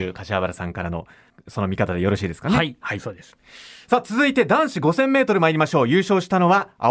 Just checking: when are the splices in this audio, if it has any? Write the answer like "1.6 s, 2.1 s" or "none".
none